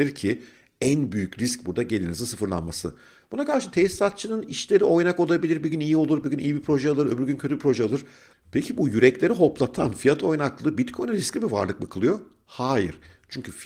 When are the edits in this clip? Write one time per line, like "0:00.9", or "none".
0:06.2
0:08.3